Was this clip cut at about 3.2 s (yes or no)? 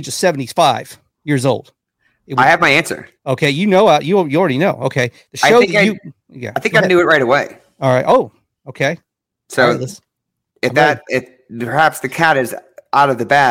yes